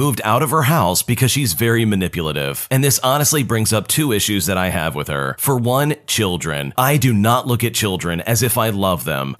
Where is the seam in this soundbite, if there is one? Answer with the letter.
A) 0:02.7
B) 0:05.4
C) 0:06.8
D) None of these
C